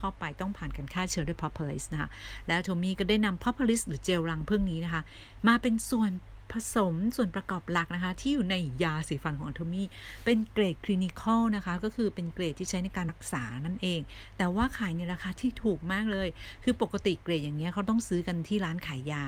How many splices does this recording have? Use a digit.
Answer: 1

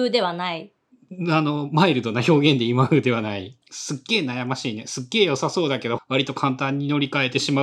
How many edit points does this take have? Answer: 2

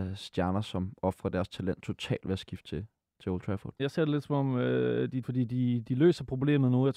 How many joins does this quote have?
2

